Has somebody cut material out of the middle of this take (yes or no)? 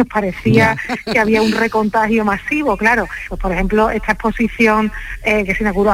yes